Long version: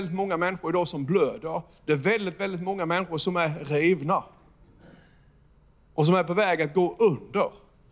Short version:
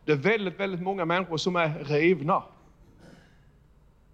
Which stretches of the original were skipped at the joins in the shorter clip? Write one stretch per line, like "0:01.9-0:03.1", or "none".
none